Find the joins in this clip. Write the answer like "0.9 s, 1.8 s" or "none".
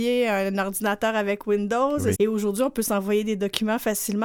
2.1 s